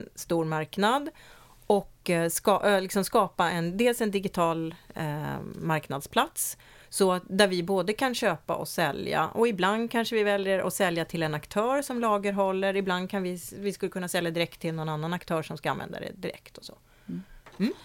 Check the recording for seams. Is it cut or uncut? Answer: uncut